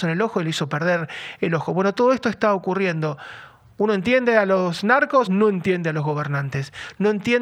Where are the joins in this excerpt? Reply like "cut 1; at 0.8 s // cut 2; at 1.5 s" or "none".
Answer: cut 1; at 5.3 s